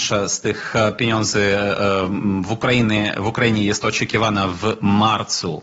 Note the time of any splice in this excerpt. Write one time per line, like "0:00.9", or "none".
none